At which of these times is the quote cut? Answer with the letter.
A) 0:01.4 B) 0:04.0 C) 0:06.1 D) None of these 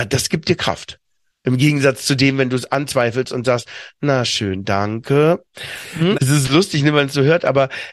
C